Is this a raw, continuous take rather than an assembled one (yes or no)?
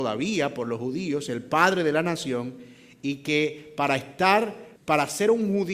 no